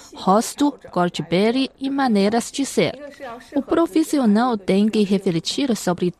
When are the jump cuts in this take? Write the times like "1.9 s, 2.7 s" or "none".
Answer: none